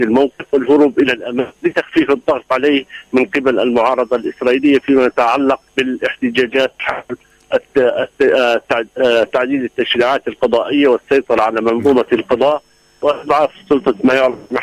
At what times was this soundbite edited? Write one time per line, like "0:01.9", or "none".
0:01.6
0:05.7